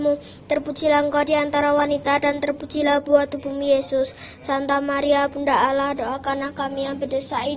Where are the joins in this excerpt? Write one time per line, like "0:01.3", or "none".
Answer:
none